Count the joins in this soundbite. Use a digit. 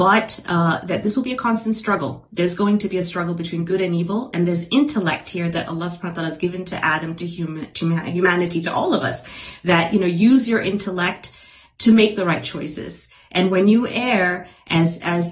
0